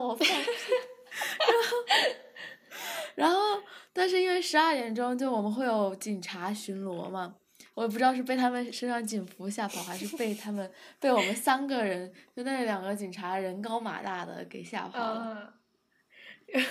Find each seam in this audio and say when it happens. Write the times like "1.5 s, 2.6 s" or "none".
7.7 s